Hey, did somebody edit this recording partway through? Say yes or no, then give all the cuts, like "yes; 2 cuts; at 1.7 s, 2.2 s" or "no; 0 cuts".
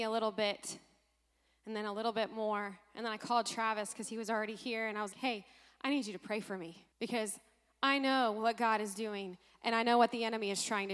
yes; 2 cuts; at 5.1 s, 6.9 s